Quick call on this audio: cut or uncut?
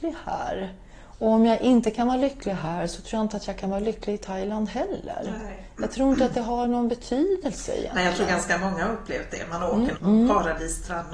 cut